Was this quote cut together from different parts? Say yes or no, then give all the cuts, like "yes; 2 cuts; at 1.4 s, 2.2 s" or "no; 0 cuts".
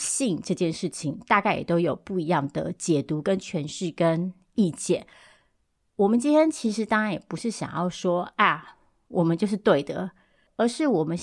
no; 0 cuts